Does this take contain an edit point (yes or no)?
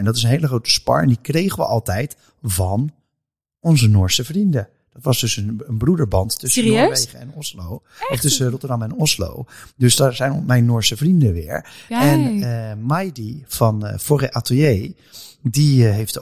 no